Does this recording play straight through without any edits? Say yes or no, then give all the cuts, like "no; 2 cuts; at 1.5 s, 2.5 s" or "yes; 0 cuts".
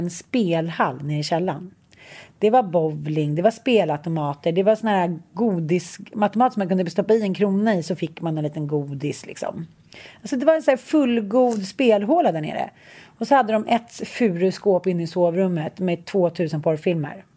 yes; 0 cuts